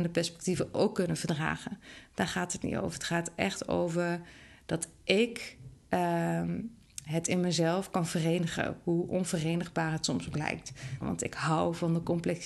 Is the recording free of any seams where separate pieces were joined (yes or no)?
no